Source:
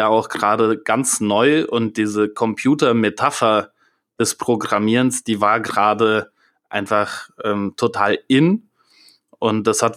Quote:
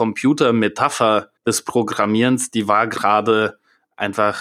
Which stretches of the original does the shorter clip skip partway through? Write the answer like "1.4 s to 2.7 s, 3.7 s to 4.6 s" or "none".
3.8 s to 4.1 s